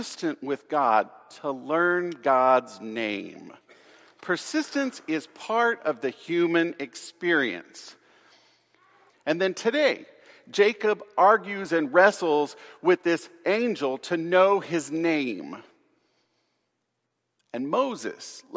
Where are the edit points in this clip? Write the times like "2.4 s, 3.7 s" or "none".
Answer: 9.1 s